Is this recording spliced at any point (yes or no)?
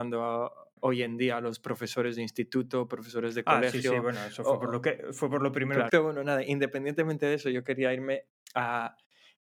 yes